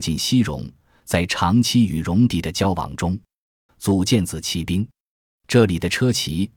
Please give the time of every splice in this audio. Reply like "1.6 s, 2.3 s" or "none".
3.7 s, 5.1 s